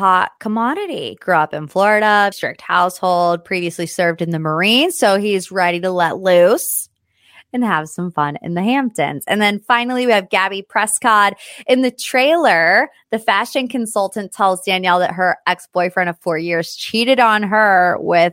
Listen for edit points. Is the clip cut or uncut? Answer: cut